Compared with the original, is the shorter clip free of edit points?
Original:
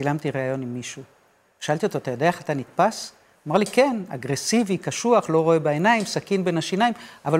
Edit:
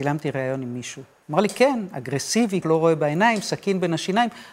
no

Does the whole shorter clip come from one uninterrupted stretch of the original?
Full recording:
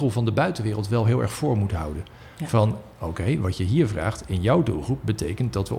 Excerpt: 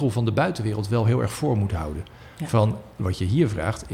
no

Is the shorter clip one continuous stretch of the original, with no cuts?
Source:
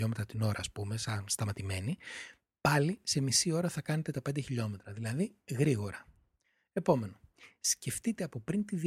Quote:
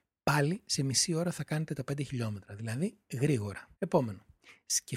no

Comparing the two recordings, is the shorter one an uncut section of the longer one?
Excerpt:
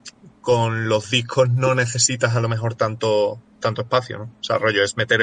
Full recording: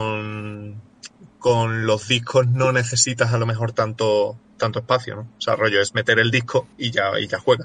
yes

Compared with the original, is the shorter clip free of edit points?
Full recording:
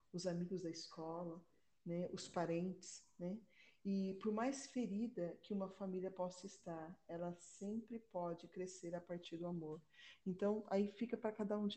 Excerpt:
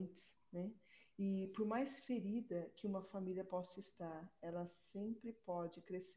yes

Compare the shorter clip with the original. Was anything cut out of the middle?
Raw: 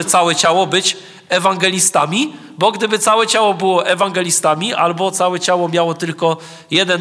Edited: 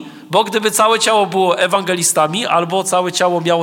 no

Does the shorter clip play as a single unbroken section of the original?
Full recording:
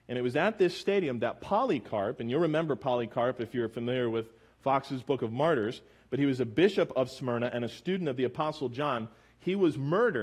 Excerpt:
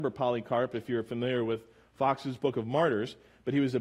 yes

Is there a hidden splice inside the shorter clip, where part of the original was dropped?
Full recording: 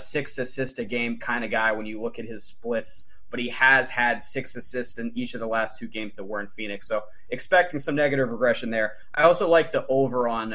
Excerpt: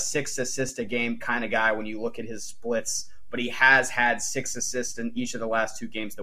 no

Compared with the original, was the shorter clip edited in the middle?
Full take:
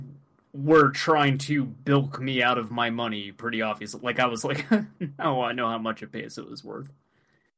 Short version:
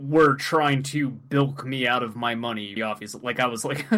yes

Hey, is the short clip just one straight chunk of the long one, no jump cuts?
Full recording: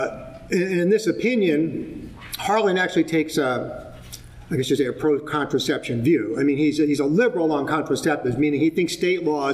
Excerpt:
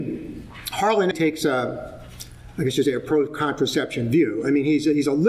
no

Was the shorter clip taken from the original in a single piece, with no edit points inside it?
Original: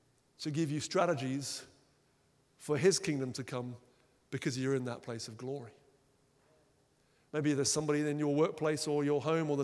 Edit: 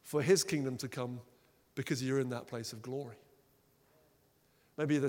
yes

